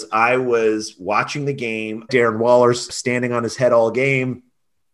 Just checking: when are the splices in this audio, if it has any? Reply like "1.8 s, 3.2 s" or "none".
2.1 s